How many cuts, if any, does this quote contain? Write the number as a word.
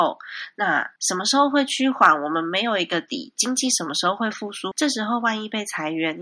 two